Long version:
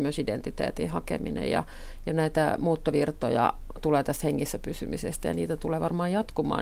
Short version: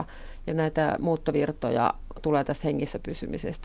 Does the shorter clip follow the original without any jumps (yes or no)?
yes